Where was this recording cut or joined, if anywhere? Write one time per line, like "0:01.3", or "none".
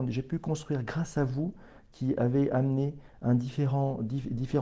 none